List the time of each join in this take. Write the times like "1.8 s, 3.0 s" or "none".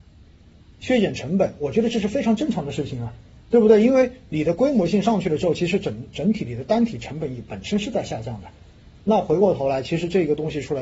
none